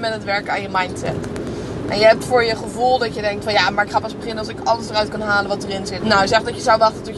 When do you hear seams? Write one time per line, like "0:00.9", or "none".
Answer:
0:06.0